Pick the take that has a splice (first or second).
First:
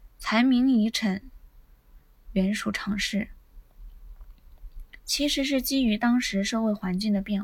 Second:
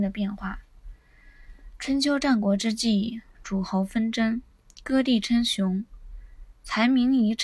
first